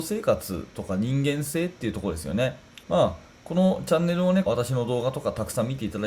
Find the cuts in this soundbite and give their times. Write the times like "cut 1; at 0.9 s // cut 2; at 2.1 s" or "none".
cut 1; at 2.8 s // cut 2; at 4.5 s